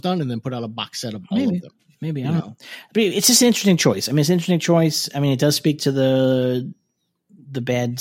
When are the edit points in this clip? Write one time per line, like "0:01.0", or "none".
none